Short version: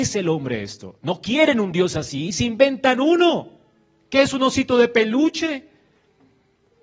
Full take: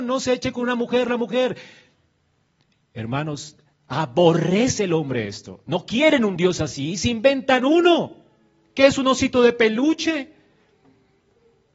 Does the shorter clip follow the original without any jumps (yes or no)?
yes